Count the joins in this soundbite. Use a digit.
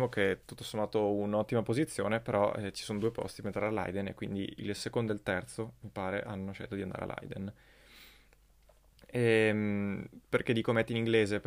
0